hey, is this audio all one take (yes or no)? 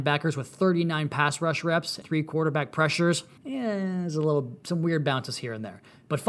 no